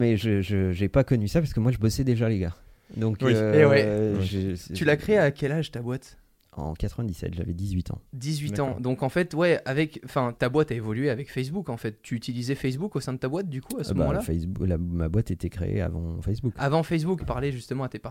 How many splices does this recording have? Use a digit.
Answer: 2